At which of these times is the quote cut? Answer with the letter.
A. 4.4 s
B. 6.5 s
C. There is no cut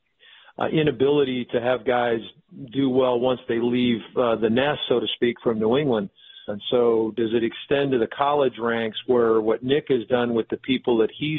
B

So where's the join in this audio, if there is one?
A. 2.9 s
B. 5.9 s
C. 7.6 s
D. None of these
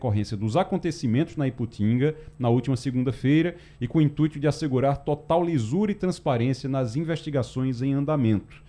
D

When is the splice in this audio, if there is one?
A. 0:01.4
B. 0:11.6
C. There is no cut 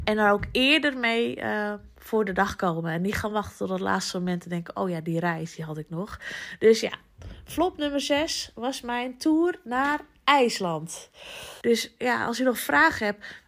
B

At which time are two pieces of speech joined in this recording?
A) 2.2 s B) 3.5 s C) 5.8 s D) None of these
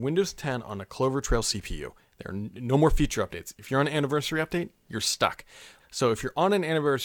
C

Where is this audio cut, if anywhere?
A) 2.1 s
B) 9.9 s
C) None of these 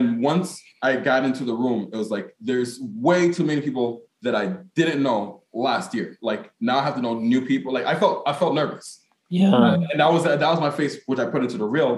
C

